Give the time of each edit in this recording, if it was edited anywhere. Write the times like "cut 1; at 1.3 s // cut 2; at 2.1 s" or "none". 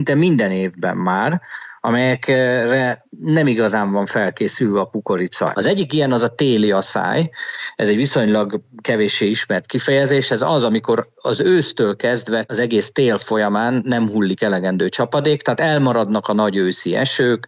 cut 1; at 5.5 s

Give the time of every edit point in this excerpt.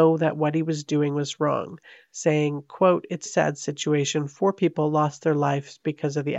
cut 1; at 3.3 s

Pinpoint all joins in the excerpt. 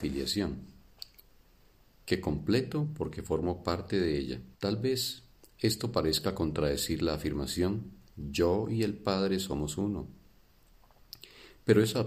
cut 1; at 4.5 s

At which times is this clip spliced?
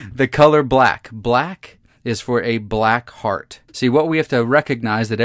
cut 1; at 3.7 s

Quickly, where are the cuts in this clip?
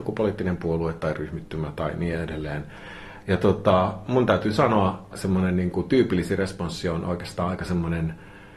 cut 1; at 3.2 s // cut 2; at 5.1 s

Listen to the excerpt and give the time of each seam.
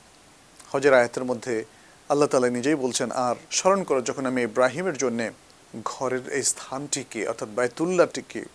cut 1; at 3.5 s

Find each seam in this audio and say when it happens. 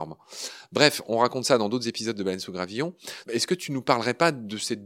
cut 1; at 3.2 s

